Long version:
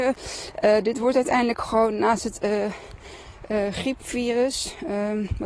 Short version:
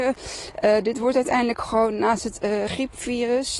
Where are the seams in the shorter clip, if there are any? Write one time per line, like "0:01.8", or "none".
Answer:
0:02.7